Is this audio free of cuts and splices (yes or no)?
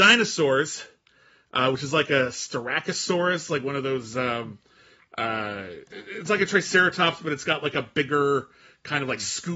yes